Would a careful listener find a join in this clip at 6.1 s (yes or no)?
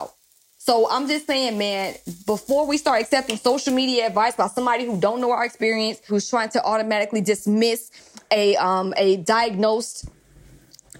yes